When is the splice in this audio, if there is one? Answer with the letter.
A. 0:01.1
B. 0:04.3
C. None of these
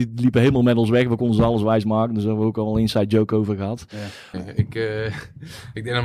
B